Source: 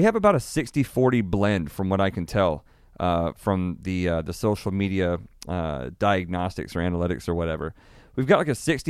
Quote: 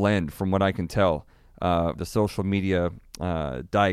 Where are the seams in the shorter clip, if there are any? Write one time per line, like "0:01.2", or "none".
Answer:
0:01.9